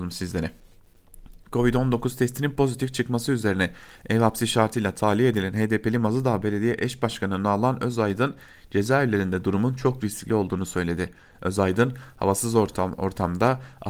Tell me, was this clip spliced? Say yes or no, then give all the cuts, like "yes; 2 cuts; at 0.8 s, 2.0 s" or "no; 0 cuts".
no; 0 cuts